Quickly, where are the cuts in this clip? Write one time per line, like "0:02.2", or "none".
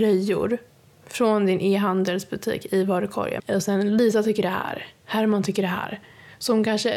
0:03.4